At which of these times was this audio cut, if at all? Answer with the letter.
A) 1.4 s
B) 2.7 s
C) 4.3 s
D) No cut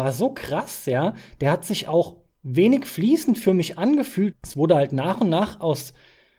C